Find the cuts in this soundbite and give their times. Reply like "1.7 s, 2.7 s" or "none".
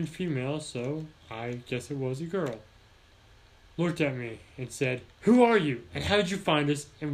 5.1 s